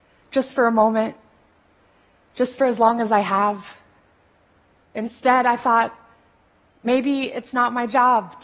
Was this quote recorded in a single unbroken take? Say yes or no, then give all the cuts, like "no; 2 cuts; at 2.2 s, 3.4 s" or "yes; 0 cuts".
no; 2 cuts; at 4.8 s, 6.7 s